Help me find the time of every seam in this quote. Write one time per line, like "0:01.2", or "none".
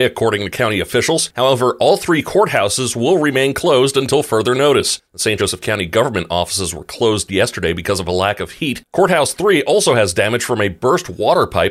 none